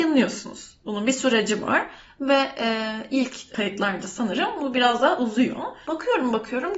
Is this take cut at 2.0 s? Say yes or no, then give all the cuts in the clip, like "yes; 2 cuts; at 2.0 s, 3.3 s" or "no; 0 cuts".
no; 1 cut; at 5.8 s